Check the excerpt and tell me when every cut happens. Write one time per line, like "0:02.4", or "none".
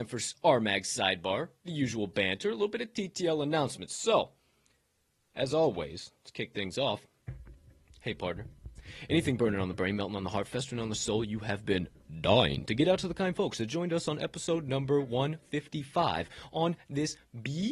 none